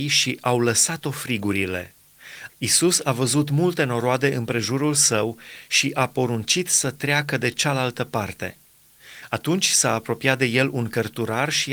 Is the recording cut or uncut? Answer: cut